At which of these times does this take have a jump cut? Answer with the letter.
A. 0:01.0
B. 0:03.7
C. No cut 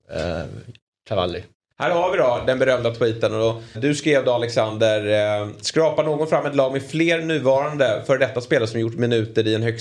B